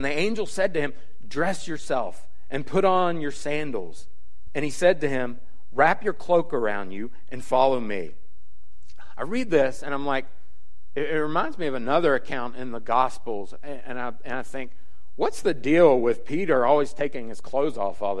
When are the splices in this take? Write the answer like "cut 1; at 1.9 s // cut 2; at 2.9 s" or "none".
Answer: cut 1; at 4.5 s